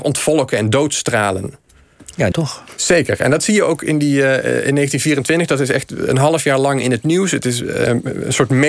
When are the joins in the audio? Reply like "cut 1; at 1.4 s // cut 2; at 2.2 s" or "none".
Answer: cut 1; at 2.3 s